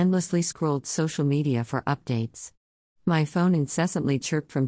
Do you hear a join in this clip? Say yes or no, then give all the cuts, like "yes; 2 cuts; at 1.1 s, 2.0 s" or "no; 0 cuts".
no; 0 cuts